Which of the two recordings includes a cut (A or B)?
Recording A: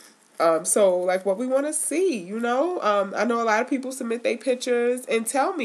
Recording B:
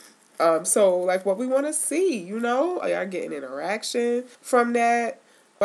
B